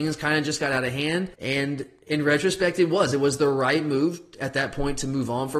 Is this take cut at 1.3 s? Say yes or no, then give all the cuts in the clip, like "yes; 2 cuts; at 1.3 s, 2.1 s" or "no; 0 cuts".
yes; 1 cut; at 1.3 s